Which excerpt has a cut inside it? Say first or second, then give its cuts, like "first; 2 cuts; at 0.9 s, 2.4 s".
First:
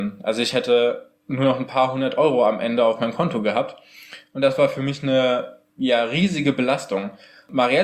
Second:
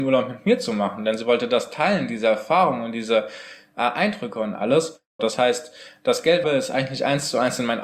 second; 2 cuts; at 5.2 s, 6.4 s